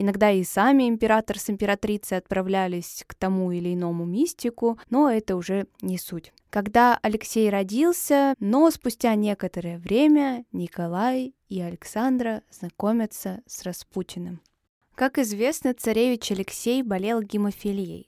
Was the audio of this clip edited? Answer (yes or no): yes